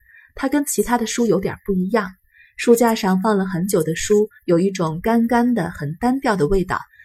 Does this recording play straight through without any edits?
yes; 0 cuts

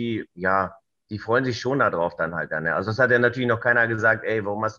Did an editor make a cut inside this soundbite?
no; 0 cuts

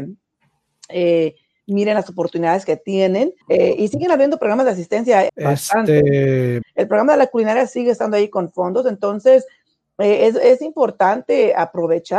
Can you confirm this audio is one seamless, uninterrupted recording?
no; 3 cuts; at 3.4 s, 5.3 s, 6.6 s

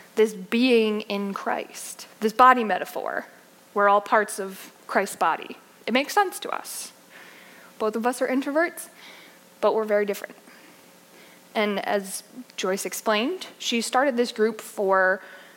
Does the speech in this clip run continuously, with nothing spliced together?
no; 2 cuts; at 2.1 s, 7.7 s

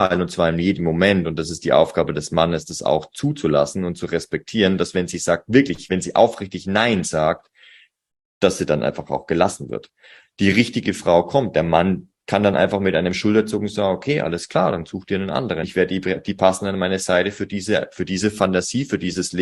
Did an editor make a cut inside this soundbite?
yes; 1 cut; at 15.6 s

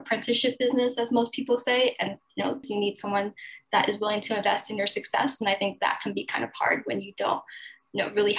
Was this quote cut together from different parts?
yes; 1 cut; at 2.6 s

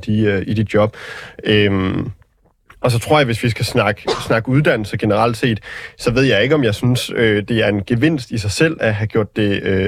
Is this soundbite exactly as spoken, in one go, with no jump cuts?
yes; 0 cuts

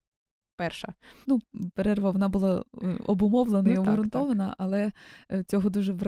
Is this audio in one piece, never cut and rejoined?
no; 1 cut; at 1.2 s

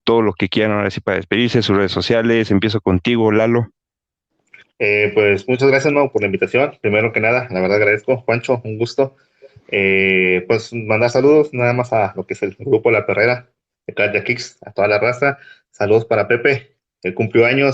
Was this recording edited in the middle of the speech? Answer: no; 0 cuts

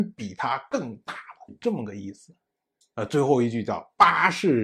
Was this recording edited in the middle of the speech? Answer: yes; 1 cut; at 2.8 s

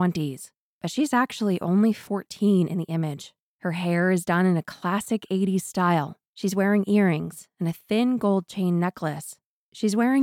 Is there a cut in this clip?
no; 0 cuts

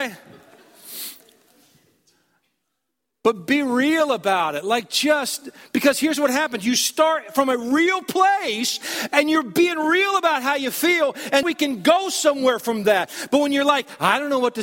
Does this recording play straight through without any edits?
no; 1 cut; at 11.4 s

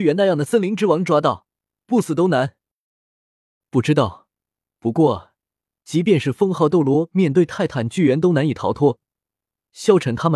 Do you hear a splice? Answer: no; 0 cuts

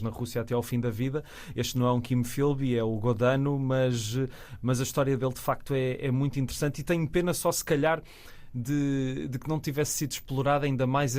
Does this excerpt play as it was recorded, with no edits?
yes; 0 cuts

